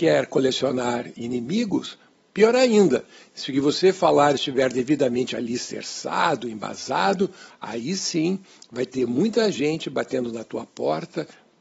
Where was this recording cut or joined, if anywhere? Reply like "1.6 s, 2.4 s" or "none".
2.2 s, 7.5 s